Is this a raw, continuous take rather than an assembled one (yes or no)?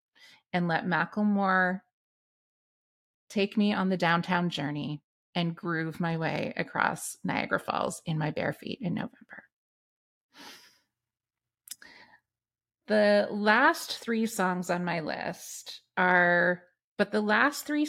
no